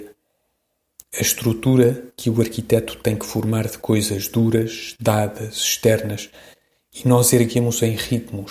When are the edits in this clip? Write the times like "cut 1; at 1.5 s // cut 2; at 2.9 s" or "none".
none

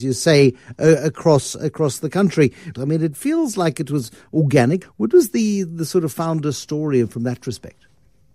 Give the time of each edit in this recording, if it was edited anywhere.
cut 1; at 2.7 s // cut 2; at 4.8 s

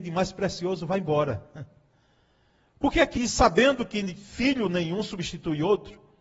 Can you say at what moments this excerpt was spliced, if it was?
cut 1; at 3.2 s

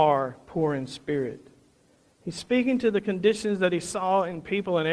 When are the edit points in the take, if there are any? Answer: cut 1; at 2.1 s

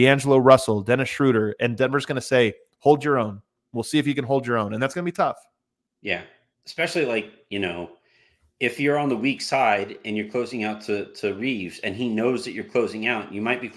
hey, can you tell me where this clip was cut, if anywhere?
none

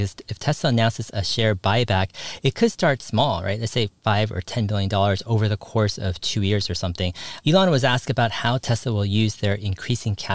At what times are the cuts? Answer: cut 1; at 7.4 s

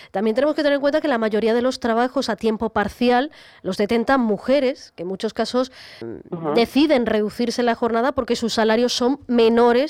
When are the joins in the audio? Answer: cut 1; at 6.0 s

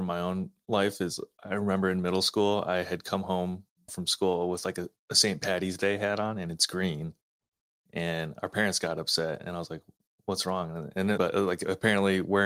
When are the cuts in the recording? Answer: cut 1; at 3.9 s // cut 2; at 11.2 s

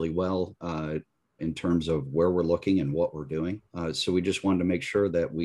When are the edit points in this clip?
cut 1; at 1.4 s // cut 2; at 3.7 s

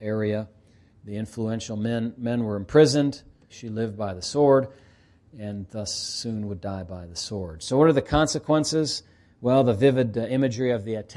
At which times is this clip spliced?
cut 1; at 0.9 s // cut 2; at 3.5 s

